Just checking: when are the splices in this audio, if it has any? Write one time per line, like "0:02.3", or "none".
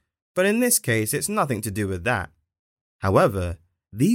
0:02.8